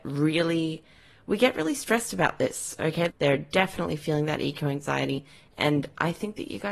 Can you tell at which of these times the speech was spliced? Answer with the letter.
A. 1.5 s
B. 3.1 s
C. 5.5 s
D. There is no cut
B